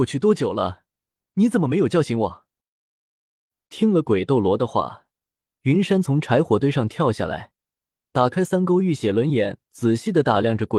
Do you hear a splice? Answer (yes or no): no